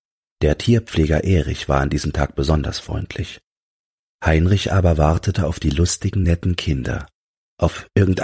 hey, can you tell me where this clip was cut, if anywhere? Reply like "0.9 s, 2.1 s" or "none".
none